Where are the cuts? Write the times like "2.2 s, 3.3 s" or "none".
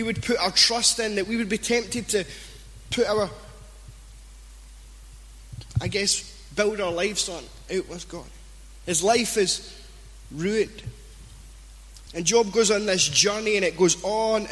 12.1 s

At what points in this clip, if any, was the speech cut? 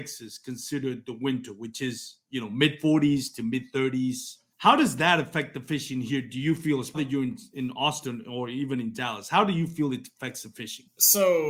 6.9 s

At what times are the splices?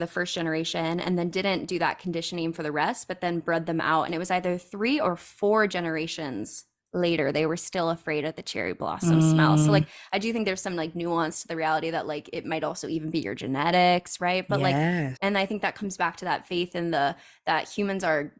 15.2 s

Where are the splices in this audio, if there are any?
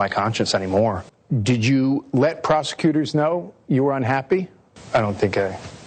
none

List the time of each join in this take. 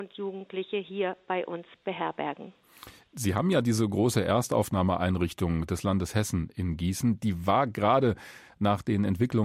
none

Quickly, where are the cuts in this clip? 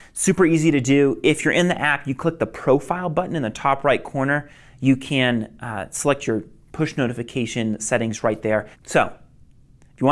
8.7 s

